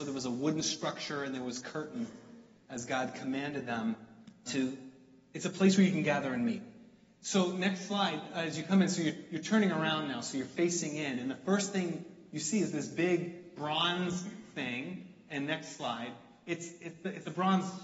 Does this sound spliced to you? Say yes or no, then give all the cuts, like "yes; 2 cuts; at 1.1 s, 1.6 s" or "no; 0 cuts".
yes; 1 cut; at 4.4 s